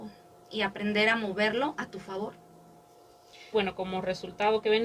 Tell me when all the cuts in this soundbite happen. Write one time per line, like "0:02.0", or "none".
0:03.5